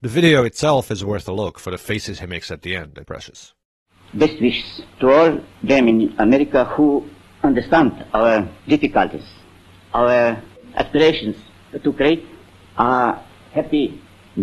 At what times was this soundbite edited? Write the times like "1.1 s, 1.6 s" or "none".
3.1 s, 8.6 s